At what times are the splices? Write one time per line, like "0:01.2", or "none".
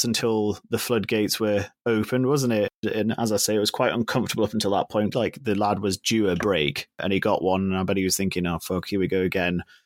0:05.1